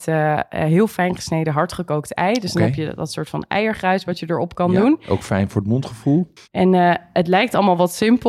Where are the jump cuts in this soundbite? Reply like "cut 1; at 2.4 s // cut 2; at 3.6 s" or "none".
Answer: cut 1; at 6.4 s